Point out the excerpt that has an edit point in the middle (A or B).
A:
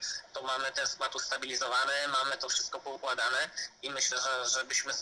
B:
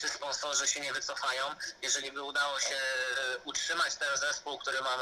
A